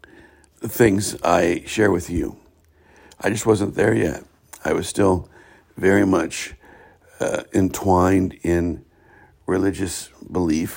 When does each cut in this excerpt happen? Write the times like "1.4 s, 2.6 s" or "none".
none